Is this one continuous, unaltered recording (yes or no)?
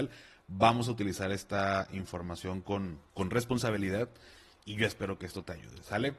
no